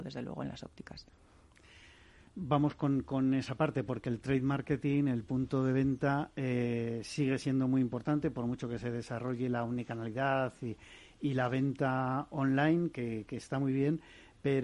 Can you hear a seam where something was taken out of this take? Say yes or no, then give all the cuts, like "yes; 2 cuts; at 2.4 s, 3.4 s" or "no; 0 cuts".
no; 0 cuts